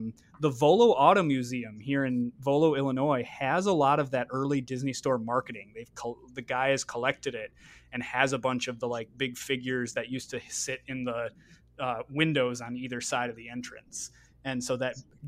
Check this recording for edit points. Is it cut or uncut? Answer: uncut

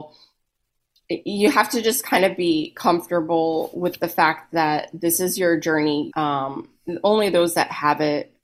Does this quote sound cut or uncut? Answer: cut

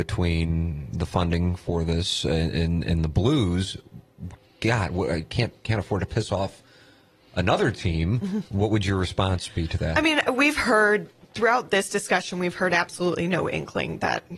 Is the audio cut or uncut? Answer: uncut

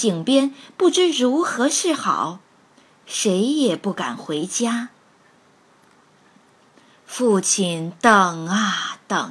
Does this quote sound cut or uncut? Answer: uncut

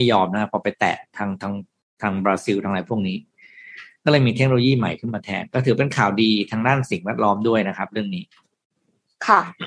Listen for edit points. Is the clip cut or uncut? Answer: uncut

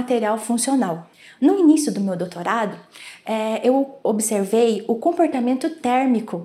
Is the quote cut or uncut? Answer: uncut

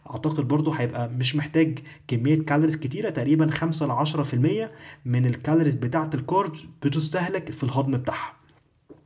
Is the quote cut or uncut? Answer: uncut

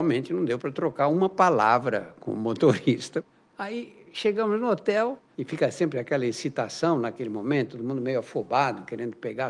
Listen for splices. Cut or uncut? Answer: cut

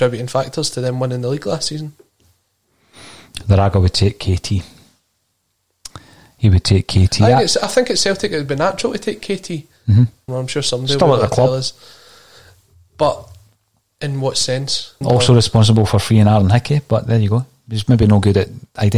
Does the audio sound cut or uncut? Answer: cut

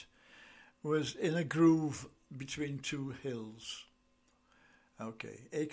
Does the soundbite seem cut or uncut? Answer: uncut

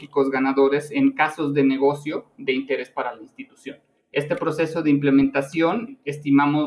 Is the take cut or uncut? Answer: uncut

